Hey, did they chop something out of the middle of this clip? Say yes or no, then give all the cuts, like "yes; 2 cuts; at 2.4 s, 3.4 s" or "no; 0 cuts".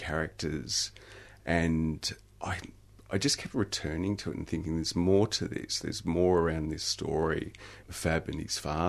yes; 1 cut; at 7.8 s